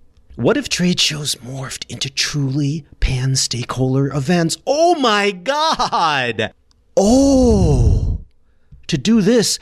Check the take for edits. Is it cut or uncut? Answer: uncut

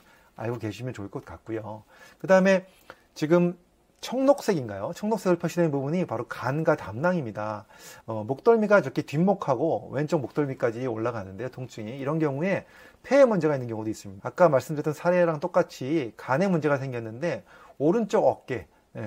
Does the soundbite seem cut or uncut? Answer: cut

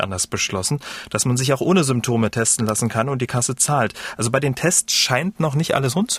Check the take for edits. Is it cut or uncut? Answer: uncut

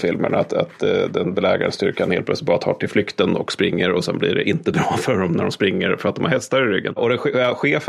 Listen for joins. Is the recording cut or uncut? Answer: uncut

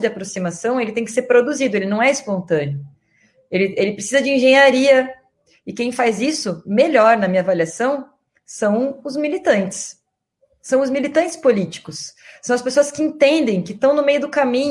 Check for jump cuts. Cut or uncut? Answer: uncut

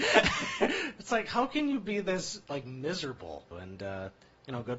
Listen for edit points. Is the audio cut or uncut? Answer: cut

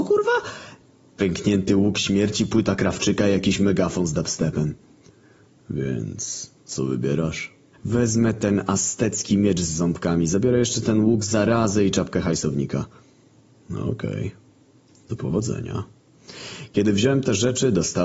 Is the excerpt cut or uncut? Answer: cut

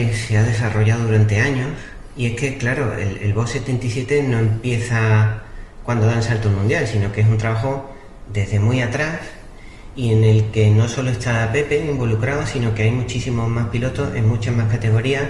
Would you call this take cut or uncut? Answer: uncut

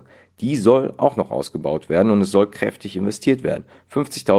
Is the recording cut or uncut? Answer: uncut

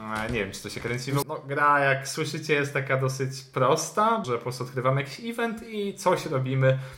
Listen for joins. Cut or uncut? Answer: cut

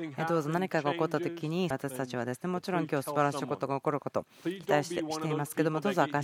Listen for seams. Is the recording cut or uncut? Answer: cut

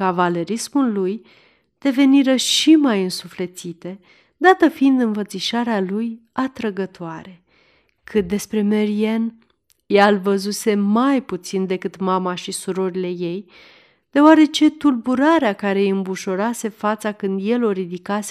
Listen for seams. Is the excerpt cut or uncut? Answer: uncut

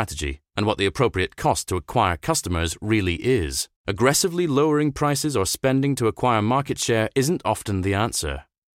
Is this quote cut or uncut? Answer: cut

